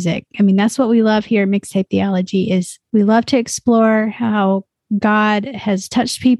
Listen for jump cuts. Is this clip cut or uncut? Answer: cut